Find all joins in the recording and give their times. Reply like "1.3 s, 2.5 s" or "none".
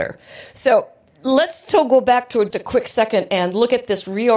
2.5 s